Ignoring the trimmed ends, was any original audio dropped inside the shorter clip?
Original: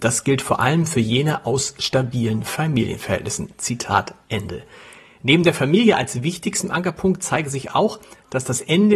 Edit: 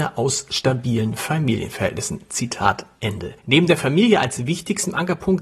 yes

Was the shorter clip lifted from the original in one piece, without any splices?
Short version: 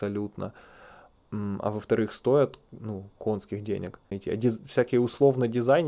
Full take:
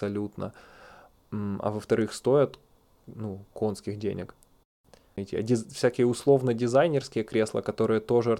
no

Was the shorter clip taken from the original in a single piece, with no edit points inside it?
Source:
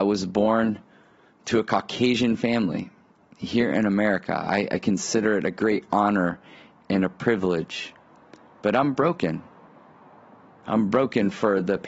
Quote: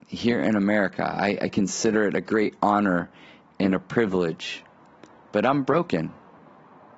yes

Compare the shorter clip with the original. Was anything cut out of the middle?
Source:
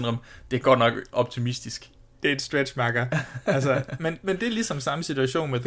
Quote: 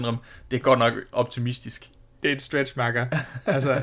no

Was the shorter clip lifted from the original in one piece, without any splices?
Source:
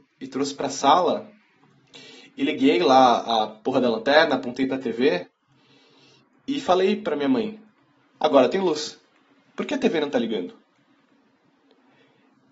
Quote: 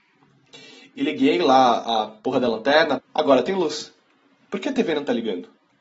no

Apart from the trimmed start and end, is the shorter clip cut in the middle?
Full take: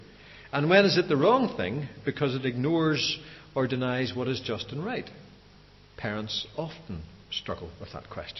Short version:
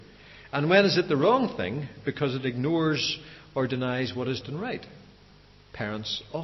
yes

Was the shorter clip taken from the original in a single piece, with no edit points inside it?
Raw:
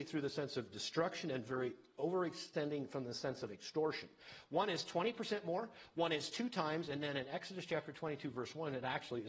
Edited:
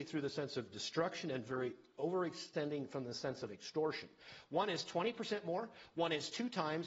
yes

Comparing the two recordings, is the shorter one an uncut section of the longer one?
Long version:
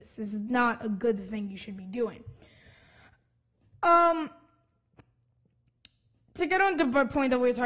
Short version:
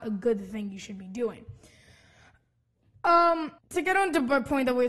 no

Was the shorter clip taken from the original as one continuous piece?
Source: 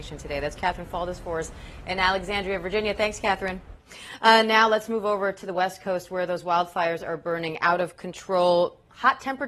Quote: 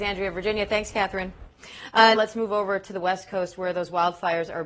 no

